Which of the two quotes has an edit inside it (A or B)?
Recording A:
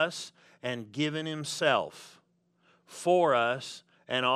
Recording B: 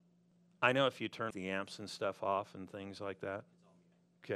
B